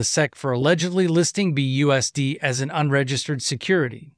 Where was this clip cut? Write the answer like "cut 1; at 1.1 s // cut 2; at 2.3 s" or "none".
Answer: none